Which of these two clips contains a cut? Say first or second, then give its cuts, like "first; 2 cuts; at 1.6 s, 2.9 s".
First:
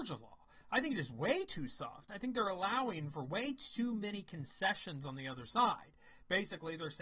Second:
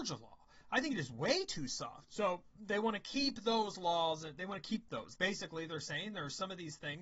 second; 2 cuts; at 2.1 s, 5.2 s